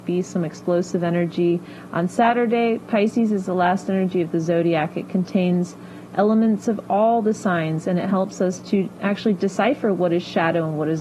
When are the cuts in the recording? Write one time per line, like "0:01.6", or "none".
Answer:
none